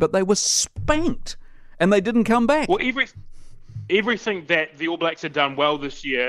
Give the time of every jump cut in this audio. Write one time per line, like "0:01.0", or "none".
none

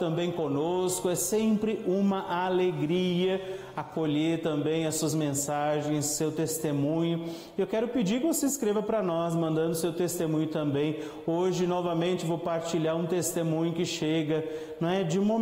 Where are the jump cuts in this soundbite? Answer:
none

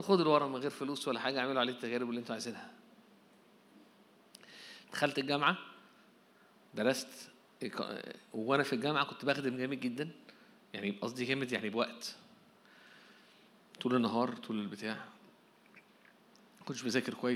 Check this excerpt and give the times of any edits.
0:04.8

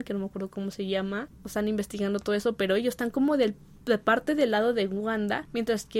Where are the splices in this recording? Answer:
0:01.3

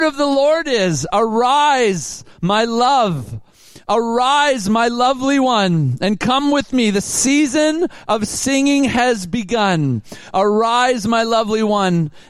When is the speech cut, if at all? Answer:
none

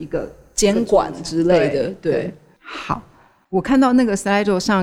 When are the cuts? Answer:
none

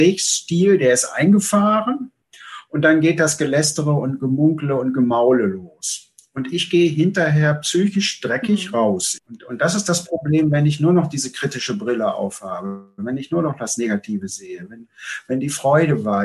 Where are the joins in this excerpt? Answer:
0:09.2

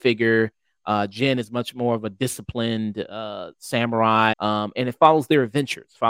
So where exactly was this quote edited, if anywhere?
0:04.3

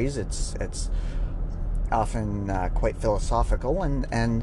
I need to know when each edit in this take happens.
none

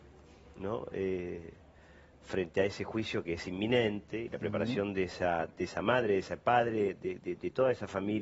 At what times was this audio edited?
none

